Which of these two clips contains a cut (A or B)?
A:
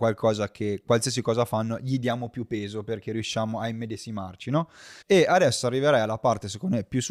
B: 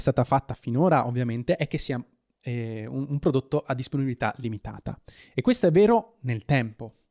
A